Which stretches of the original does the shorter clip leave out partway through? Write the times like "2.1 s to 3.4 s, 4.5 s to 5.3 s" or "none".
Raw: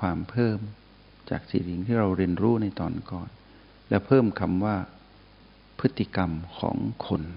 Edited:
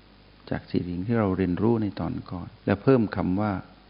3.4 s to 3.8 s